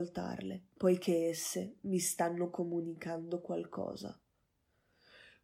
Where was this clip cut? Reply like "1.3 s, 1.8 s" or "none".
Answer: none